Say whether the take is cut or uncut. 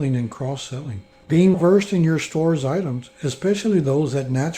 cut